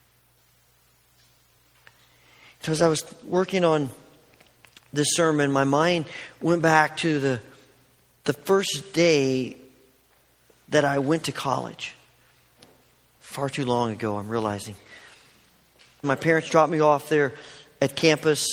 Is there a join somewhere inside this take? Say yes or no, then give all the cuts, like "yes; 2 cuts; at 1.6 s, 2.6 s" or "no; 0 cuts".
yes; 1 cut; at 16.0 s